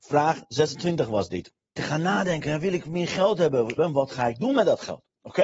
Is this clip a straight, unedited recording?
no; 2 cuts; at 1.8 s, 3.8 s

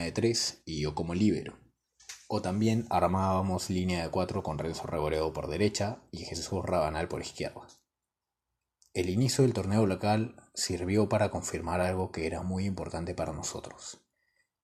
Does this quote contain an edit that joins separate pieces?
no; 0 cuts

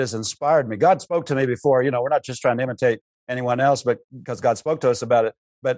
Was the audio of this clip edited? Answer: no; 0 cuts

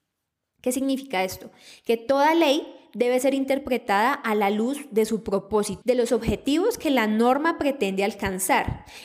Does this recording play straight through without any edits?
no; 1 cut; at 5.8 s

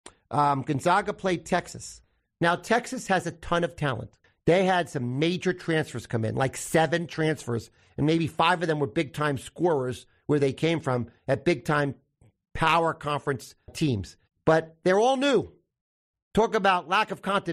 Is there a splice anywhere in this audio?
no; 0 cuts

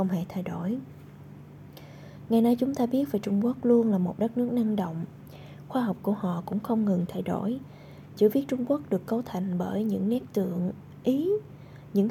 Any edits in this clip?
yes; 1 cut; at 8.1 s

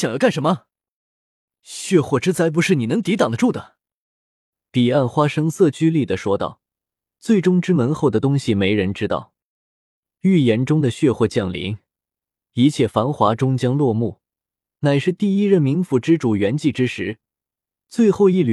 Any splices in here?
no; 0 cuts

